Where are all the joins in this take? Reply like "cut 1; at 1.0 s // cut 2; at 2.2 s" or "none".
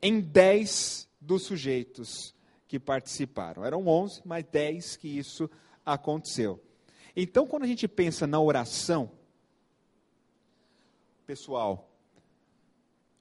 none